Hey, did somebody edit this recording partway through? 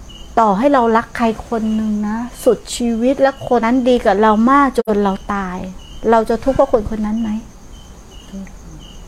yes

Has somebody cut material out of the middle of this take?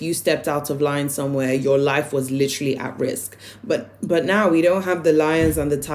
no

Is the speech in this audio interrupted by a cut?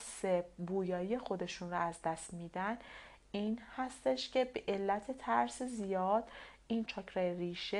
yes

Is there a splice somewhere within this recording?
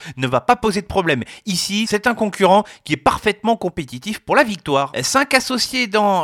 no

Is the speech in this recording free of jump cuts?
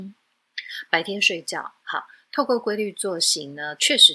no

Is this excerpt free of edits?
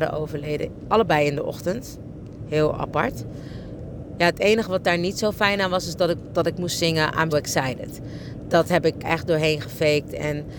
no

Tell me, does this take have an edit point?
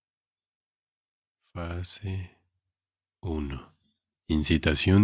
yes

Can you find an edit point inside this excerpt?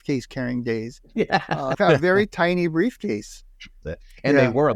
yes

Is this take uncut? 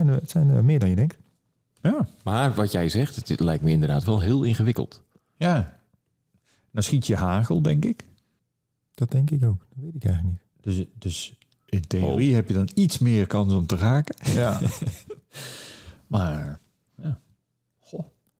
yes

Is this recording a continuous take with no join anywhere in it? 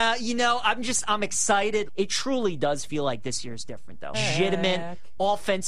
no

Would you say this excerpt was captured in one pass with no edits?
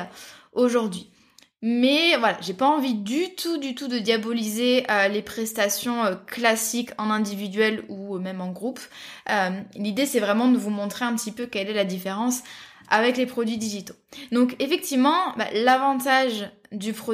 yes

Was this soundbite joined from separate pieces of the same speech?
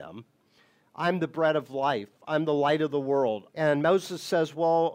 yes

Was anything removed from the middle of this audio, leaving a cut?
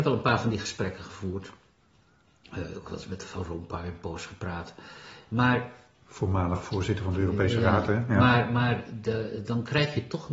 no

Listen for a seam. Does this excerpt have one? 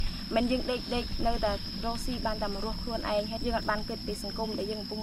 yes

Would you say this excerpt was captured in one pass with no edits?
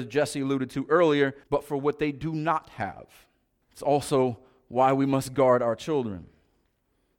no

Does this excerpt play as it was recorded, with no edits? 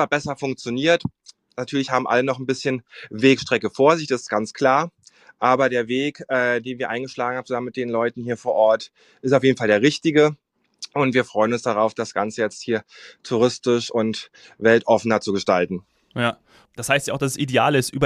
yes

